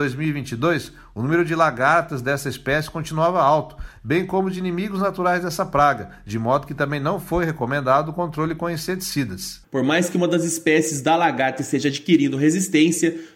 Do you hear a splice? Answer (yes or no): yes